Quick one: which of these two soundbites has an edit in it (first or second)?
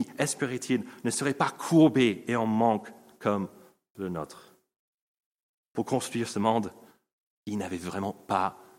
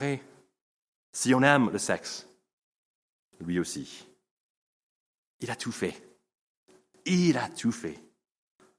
second